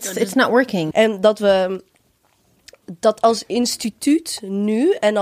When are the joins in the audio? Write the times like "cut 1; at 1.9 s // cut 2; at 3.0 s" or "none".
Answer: cut 1; at 0.9 s